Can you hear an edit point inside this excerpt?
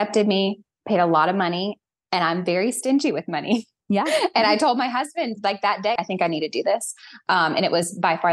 yes; 1 cut; at 6.0 s

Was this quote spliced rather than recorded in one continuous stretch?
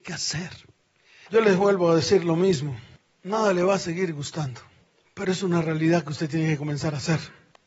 yes; 1 cut; at 1.3 s

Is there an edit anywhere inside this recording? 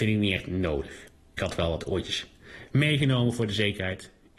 no; 0 cuts

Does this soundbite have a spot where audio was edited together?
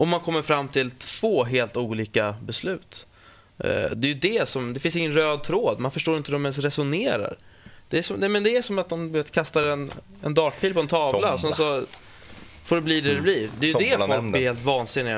no; 0 cuts

